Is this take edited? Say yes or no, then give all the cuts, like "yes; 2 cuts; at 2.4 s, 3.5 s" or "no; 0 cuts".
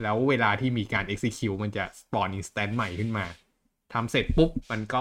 no; 0 cuts